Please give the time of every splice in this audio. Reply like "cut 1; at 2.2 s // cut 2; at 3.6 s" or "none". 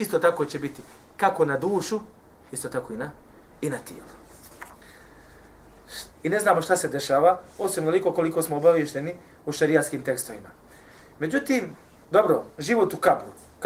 cut 1; at 6.1 s // cut 2; at 12.5 s